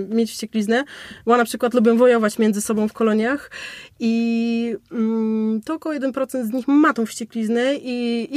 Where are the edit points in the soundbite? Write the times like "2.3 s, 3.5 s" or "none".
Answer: none